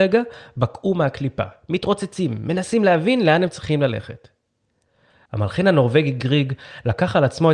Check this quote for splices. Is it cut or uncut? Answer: cut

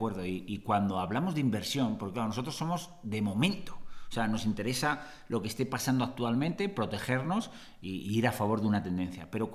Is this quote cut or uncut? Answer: uncut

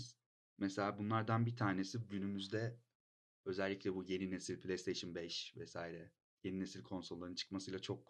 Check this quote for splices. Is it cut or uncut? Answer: uncut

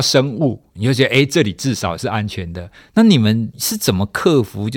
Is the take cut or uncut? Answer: cut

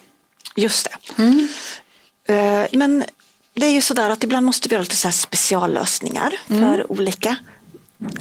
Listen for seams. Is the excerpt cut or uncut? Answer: cut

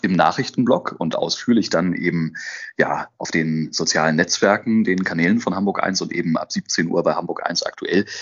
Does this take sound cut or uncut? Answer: uncut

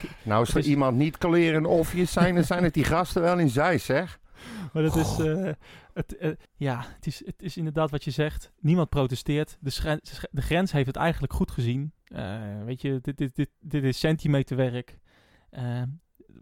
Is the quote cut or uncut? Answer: cut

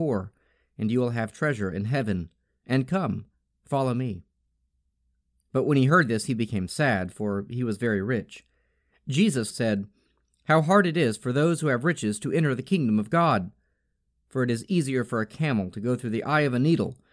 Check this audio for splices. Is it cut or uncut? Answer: cut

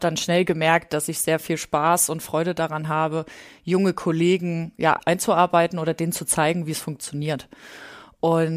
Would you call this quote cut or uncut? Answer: uncut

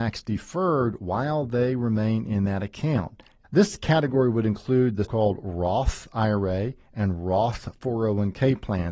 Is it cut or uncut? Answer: cut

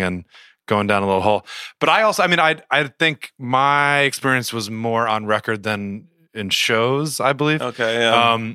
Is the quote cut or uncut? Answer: uncut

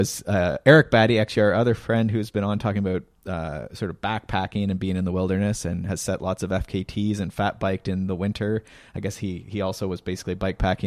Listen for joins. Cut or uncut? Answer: uncut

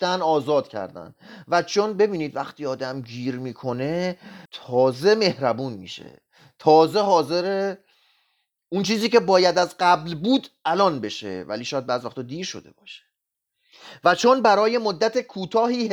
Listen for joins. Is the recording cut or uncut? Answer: cut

